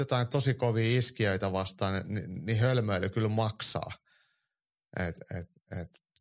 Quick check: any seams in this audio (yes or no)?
no